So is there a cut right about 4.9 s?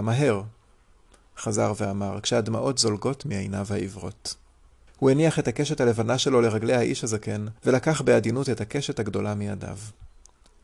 yes; 2 cuts; at 4.9 s, 7.6 s

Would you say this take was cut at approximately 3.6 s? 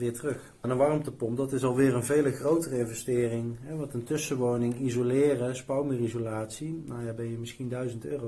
no; 0 cuts

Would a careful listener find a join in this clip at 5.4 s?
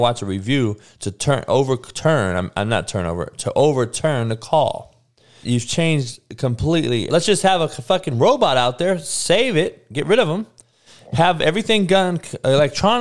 yes; 2 cuts; at 5.4 s, 7.1 s

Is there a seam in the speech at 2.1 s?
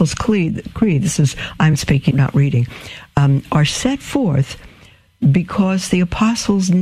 yes; 1 cut; at 2.1 s

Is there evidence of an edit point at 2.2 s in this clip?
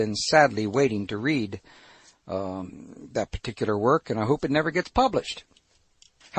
no; 0 cuts

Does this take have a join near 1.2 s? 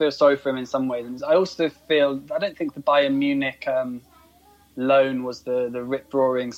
no; 0 cuts

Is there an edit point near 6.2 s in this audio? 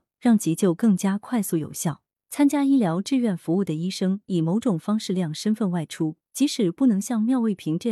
yes; 1 cut; at 6.2 s

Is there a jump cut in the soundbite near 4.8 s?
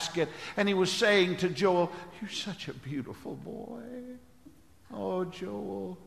yes; 1 cut; at 4.8 s

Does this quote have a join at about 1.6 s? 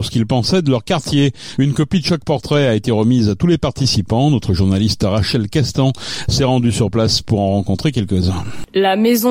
yes; 1 cut; at 1.6 s

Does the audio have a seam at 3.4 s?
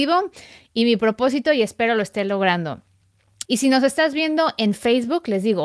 yes; 1 cut; at 3.4 s

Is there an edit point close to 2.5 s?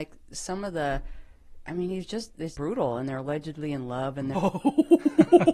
yes; 2 cuts; at 2.5 s, 4.3 s

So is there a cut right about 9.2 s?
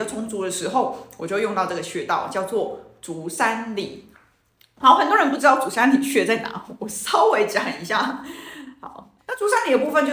yes; 1 cut; at 9.2 s

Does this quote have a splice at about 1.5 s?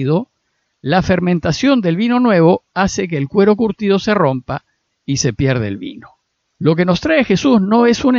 no; 1 cut; at 6.4 s

